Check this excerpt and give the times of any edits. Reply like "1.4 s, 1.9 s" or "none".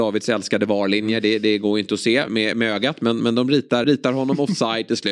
2.3 s, 3.8 s